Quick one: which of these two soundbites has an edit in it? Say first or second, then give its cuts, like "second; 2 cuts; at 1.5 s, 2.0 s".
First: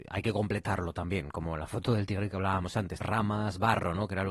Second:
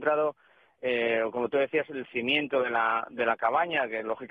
first; 1 cut; at 3.0 s